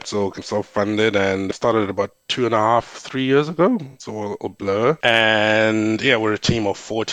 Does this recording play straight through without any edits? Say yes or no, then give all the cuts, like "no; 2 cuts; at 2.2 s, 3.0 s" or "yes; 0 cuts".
yes; 0 cuts